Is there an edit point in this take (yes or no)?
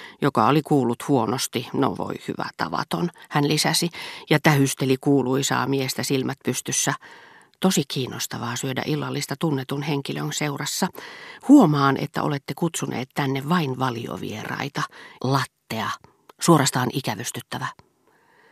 yes